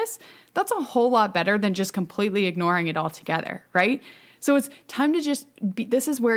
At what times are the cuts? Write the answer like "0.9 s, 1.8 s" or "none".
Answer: none